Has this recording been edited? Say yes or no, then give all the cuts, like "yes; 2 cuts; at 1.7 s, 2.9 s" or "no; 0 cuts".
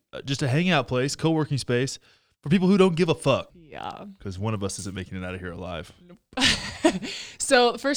yes; 1 cut; at 3.5 s